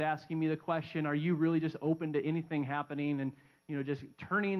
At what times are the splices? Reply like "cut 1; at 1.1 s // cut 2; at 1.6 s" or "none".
none